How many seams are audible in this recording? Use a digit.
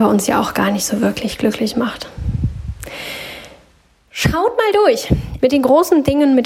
1